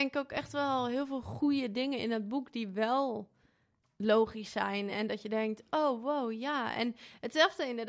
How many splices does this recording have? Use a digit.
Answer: 0